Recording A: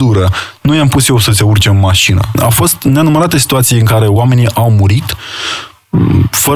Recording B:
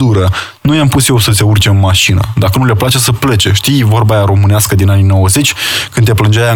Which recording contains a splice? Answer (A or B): A